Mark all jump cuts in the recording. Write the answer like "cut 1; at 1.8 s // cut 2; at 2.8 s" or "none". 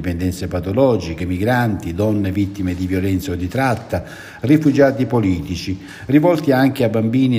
none